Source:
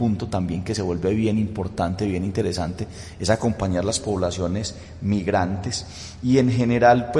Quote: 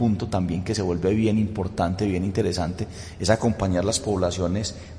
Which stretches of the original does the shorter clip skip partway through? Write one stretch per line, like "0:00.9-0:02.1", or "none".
none